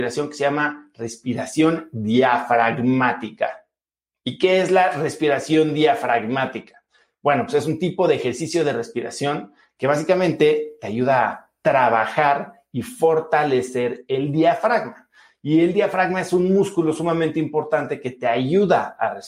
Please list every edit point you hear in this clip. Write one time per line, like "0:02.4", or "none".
none